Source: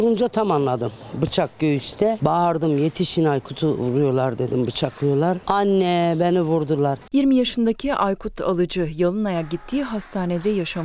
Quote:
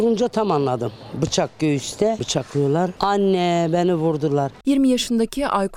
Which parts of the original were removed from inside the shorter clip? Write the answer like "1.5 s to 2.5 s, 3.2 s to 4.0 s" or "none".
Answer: 2.2 s to 4.7 s